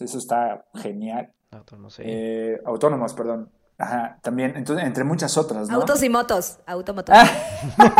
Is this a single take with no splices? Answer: no; 1 cut; at 3.7 s

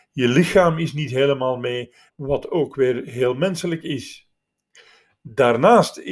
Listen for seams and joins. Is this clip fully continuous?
no; 1 cut; at 2.1 s

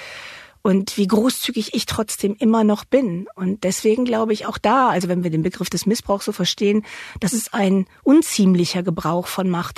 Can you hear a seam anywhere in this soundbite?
no; 0 cuts

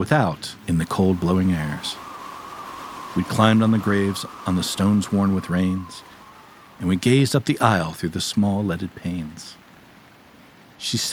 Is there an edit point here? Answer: no; 0 cuts

